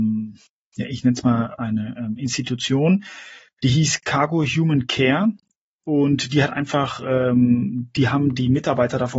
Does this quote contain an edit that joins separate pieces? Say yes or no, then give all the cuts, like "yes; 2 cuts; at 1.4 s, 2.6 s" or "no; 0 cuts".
no; 0 cuts